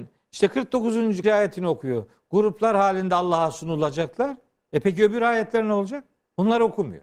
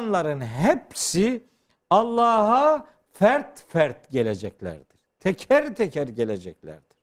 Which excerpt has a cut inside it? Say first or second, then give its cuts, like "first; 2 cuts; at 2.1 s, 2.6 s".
first; 1 cut; at 1.2 s